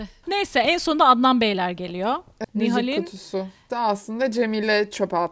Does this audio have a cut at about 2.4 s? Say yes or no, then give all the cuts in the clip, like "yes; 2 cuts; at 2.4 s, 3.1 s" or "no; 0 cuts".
yes; 2 cuts; at 2.4 s, 3.7 s